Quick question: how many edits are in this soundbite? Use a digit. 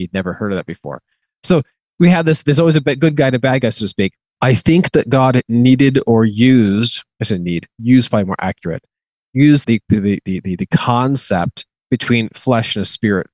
2